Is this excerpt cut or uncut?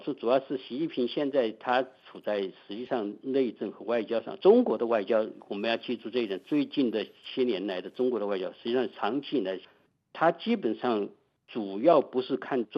uncut